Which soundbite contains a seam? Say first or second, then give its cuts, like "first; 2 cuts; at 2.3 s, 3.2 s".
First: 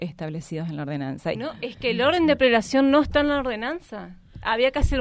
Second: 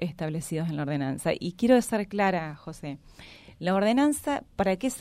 first; 1 cut; at 1.3 s